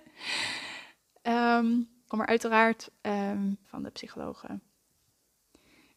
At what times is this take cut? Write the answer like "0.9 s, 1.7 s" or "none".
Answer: 2.1 s, 3.6 s